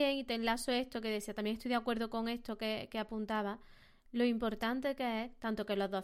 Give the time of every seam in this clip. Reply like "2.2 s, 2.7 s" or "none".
none